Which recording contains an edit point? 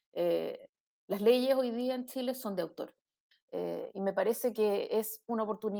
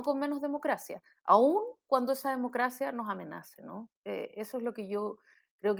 first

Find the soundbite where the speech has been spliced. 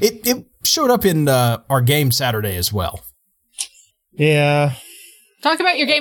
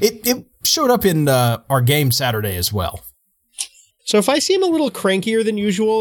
second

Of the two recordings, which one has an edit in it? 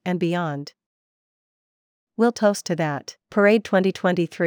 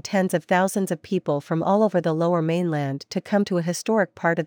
first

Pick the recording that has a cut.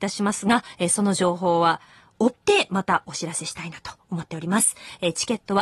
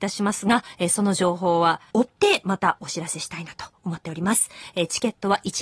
second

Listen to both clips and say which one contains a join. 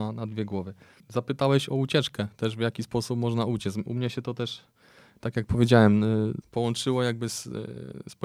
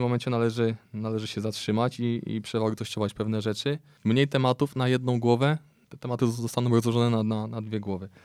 second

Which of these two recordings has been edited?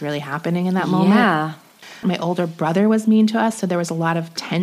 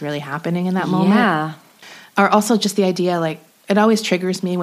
first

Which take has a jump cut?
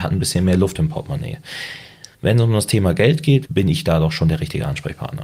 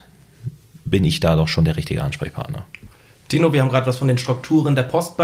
first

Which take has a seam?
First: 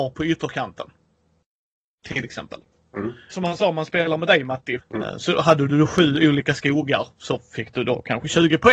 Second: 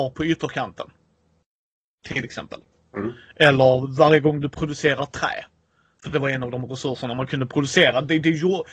first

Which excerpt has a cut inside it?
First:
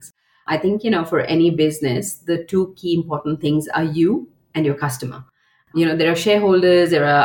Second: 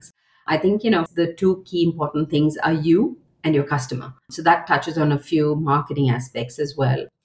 second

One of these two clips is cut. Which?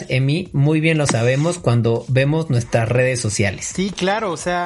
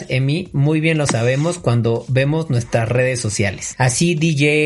second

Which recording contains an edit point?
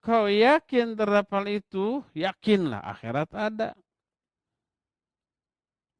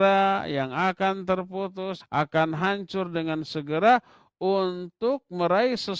second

